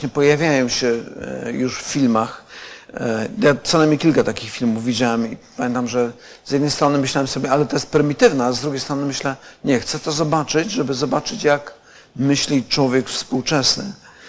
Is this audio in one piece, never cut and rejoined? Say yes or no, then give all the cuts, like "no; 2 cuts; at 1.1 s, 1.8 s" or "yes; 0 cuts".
yes; 0 cuts